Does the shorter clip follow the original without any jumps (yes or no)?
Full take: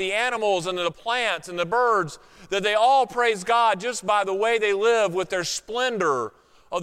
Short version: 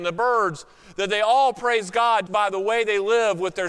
no